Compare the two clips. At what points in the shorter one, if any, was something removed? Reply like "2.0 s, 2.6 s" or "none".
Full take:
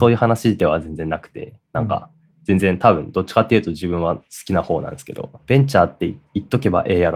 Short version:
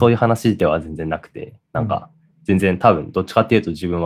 none